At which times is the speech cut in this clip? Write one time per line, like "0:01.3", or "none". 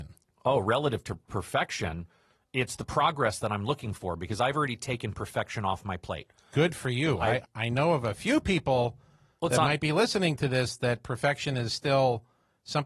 none